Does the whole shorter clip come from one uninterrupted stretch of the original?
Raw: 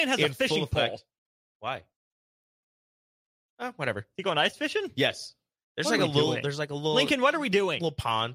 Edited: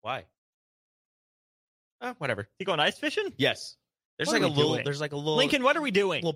yes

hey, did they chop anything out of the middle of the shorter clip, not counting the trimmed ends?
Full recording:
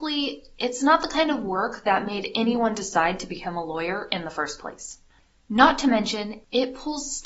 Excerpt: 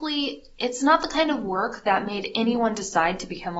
no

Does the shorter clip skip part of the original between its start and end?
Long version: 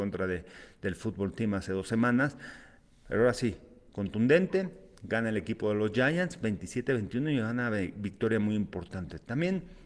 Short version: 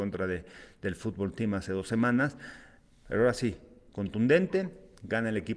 no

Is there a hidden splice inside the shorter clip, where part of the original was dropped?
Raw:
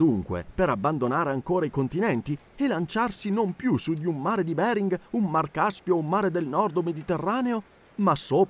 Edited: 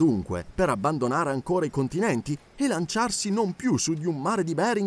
no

